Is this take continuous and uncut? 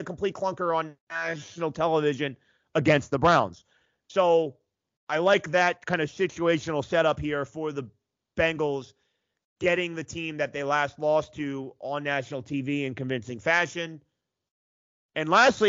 yes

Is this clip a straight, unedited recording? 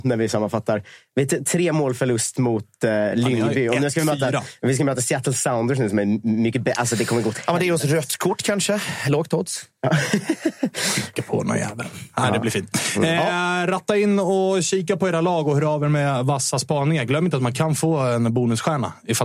no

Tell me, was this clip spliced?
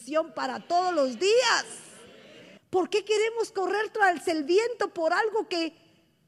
yes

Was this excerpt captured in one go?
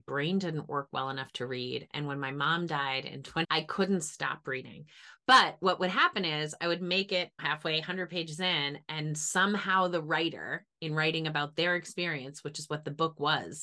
yes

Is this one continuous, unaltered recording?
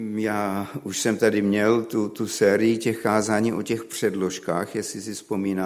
yes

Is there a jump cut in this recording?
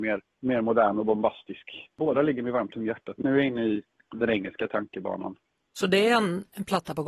yes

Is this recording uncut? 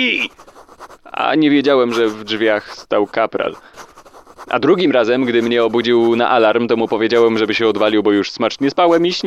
yes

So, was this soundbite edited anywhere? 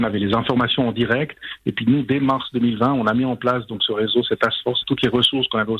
yes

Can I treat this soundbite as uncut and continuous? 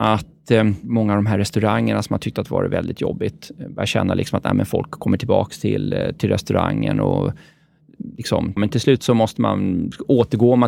no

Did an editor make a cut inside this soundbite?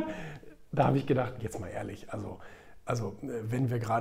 no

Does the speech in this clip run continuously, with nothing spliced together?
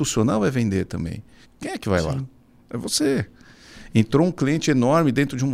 no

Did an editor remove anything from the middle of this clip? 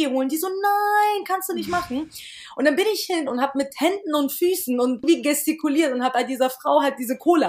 yes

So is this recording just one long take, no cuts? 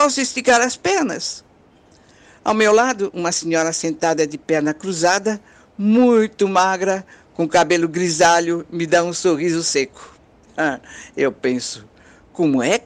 yes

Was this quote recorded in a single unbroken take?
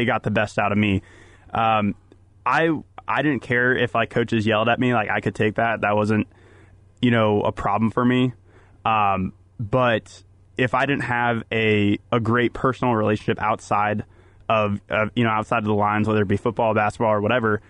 no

